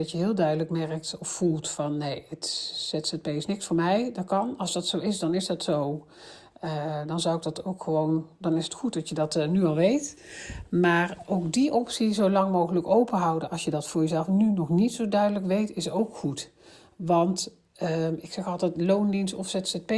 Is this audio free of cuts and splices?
no; 1 cut; at 18.7 s

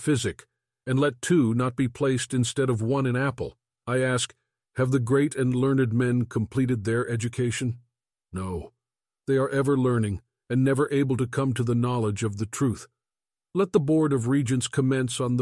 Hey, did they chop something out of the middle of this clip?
no; 0 cuts

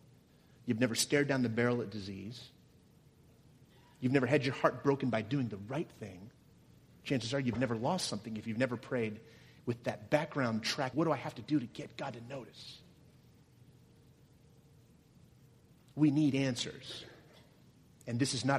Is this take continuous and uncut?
no; 1 cut; at 10.9 s

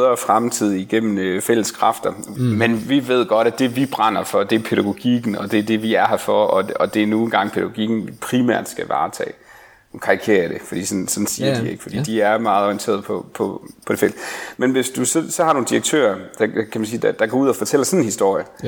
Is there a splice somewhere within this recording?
yes; 1 cut; at 2.4 s

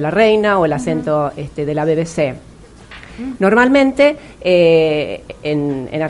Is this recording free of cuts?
no; 1 cut; at 3.3 s

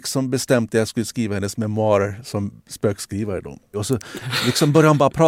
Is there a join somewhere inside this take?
yes; 1 cut; at 3.7 s

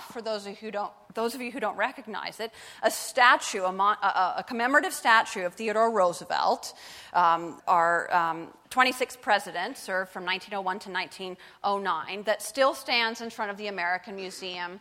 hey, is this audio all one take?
no; 1 cut; at 7.6 s

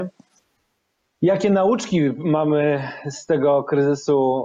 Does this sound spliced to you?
no; 0 cuts

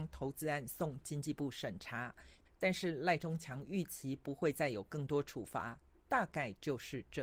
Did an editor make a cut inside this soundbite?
yes; 1 cut; at 2.5 s

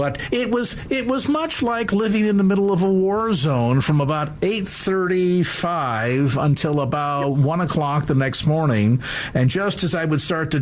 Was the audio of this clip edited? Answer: no; 0 cuts

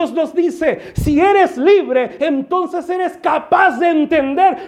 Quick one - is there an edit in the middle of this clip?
no; 0 cuts

